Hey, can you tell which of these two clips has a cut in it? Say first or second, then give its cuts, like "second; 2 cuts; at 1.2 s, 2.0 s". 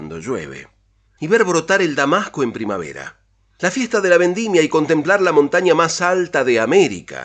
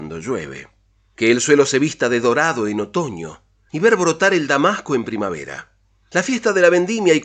first; 1 cut; at 1.1 s